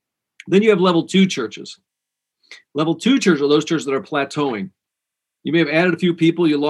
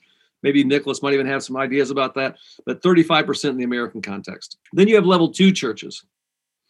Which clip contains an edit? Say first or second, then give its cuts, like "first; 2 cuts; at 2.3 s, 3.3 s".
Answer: second; 1 cut; at 4.7 s